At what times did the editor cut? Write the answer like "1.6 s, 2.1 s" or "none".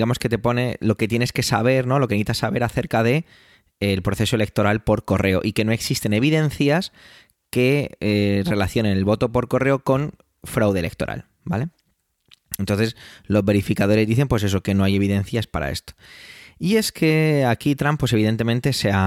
none